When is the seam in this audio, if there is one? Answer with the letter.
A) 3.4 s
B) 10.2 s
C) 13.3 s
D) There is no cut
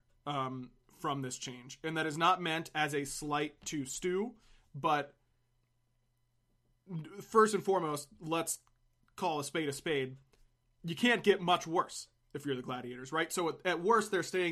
D